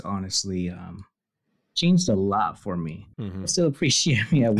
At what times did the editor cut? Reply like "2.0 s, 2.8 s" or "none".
3.1 s